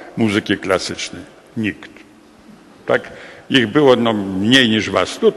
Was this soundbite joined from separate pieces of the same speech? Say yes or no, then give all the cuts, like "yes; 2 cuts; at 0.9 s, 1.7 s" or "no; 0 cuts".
no; 0 cuts